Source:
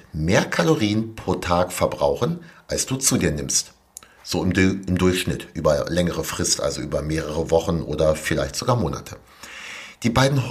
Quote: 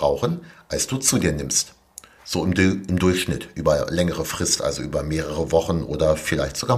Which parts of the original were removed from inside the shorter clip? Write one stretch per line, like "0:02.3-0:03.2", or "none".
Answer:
none